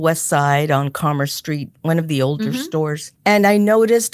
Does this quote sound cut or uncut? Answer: cut